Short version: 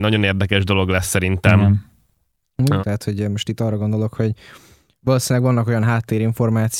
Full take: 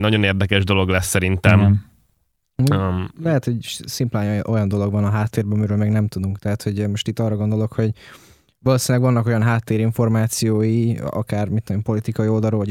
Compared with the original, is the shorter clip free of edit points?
no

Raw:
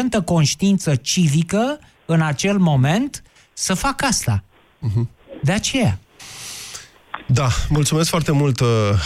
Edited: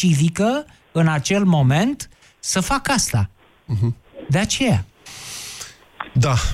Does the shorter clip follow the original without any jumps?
yes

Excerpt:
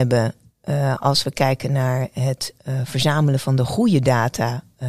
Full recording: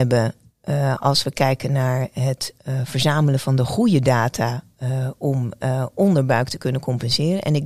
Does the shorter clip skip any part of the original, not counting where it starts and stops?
no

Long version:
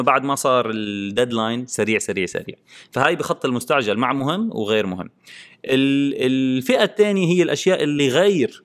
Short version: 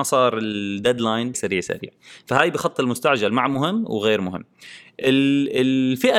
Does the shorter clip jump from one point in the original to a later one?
yes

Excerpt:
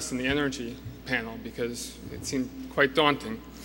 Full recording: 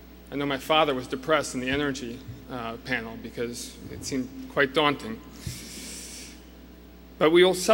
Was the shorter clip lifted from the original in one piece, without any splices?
no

